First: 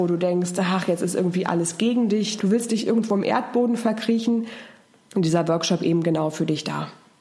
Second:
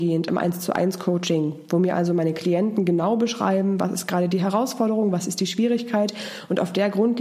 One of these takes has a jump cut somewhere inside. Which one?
first; 2 cuts; at 2.4 s, 5.1 s

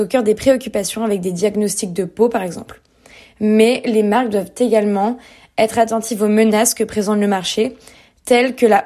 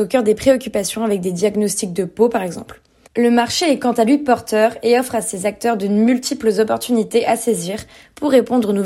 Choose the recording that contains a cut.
second; 1 cut; at 3.1 s

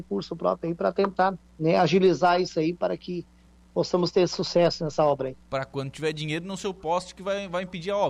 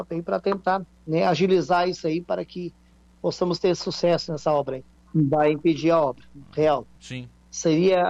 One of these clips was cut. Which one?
second; 2 cuts; at 4.9 s, 6.9 s

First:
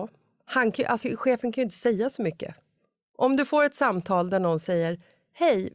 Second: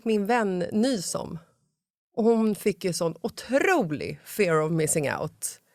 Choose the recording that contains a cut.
first; 1 cut; at 1.0 s

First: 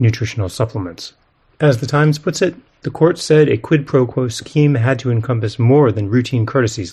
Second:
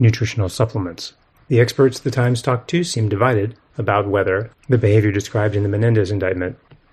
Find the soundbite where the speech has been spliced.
second; 2 cuts; at 1.3 s, 4.6 s

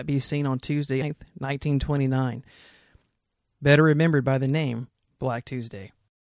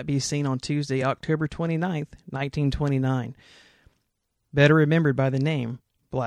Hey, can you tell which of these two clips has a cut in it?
first; 1 cut; at 1.0 s

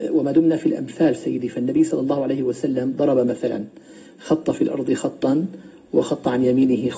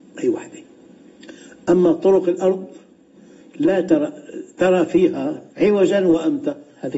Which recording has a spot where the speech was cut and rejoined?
second; 1 cut; at 5.5 s

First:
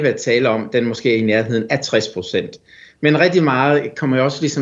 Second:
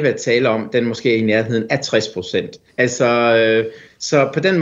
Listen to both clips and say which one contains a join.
second; 1 cut; at 2.7 s

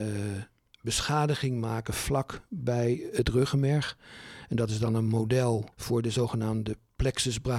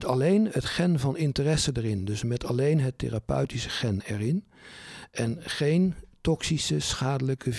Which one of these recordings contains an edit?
first; 1 cut; at 5.7 s

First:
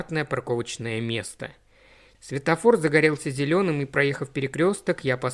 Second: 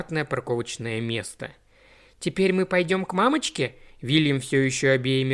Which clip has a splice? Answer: first; 1 cut; at 2.1 s

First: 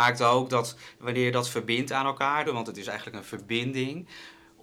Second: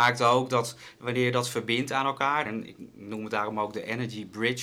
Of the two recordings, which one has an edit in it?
first; 1 cut; at 2.4 s

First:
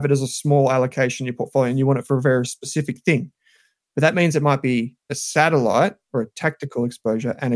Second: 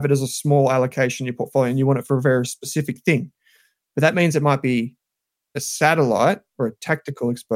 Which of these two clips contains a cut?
first; 1 cut; at 5.0 s

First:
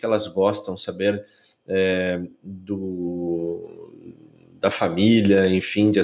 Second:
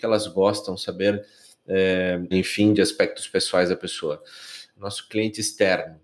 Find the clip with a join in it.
second; 2 cuts; at 2.3 s, 4.7 s

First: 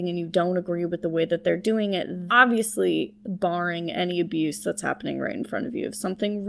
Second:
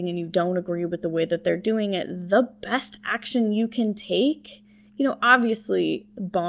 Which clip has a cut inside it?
first; 1 cut; at 2.3 s

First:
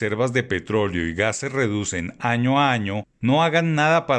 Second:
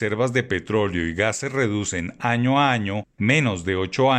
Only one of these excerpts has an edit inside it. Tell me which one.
first; 1 cut; at 3.2 s

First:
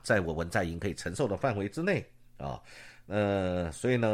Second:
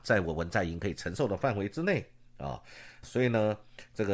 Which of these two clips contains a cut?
second; 1 cut; at 3.0 s

